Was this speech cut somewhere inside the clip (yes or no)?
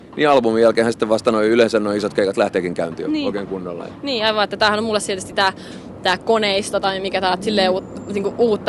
no